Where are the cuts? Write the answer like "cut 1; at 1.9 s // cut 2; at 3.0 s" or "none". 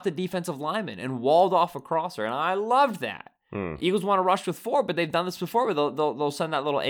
none